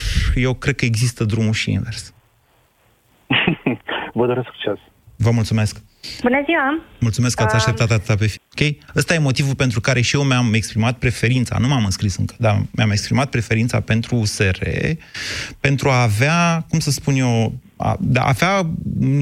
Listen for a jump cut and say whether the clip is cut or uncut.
cut